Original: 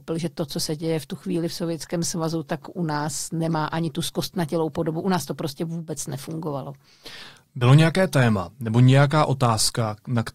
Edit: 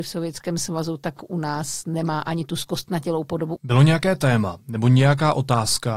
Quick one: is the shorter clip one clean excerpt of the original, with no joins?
no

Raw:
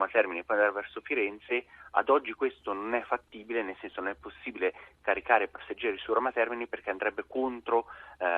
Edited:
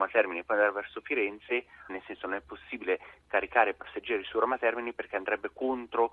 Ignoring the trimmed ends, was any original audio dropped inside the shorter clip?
yes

